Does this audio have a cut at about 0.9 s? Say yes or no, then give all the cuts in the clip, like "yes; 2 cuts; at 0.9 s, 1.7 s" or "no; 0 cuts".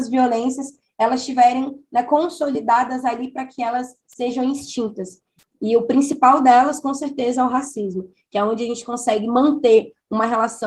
no; 1 cut; at 5.4 s